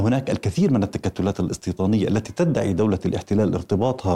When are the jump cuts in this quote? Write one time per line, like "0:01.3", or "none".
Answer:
none